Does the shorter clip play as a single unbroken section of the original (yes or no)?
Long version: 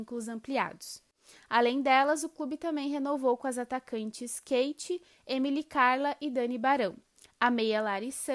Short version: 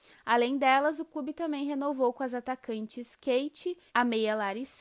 no